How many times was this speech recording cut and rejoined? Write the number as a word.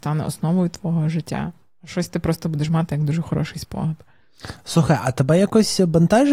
zero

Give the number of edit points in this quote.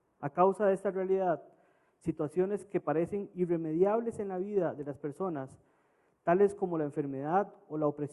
zero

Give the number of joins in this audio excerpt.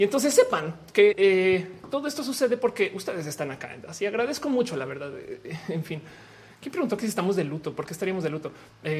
one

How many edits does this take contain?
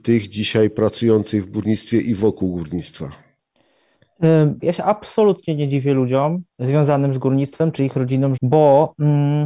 three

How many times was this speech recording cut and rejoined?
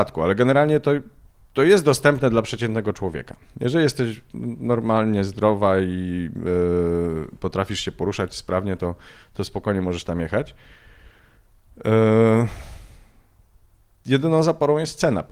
zero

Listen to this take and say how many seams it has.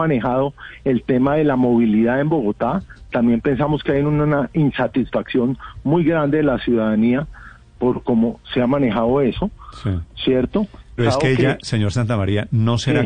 one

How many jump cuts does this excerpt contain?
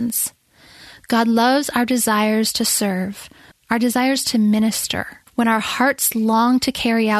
two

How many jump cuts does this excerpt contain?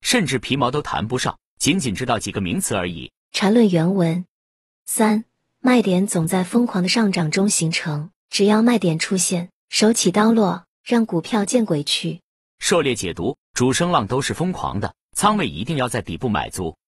two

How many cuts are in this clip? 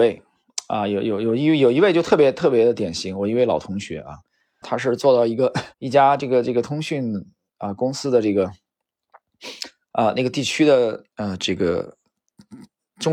three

